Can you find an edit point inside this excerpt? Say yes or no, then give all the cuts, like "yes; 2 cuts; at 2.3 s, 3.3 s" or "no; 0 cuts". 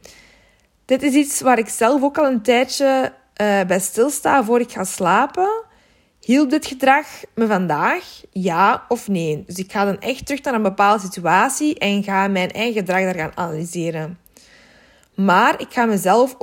no; 0 cuts